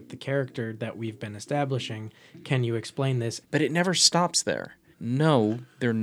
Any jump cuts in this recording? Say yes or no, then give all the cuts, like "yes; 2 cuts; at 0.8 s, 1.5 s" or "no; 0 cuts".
yes; 2 cuts; at 3.4 s, 4.9 s